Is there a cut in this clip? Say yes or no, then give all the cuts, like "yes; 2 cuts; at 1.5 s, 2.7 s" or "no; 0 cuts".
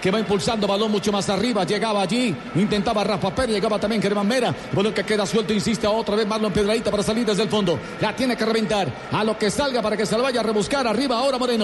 no; 0 cuts